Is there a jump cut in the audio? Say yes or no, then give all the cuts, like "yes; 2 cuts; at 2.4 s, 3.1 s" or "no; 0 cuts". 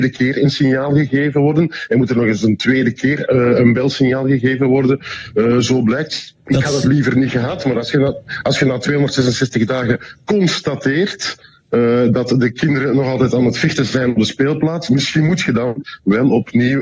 no; 0 cuts